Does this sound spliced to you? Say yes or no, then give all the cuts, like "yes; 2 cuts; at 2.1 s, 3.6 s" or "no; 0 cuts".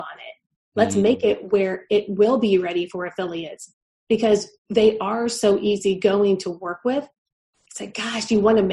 no; 0 cuts